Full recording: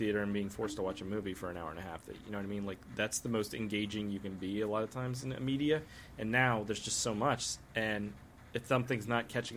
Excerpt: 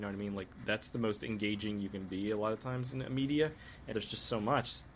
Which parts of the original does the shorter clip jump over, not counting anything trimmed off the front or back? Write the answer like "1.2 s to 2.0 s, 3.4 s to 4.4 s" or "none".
6.2 s to 6.7 s